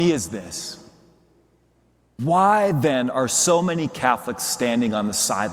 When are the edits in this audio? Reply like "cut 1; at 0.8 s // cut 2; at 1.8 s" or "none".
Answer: none